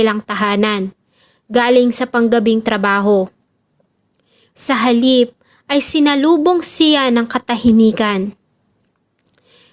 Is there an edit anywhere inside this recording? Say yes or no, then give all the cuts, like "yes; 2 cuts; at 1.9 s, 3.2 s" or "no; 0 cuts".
yes; 1 cut; at 4.5 s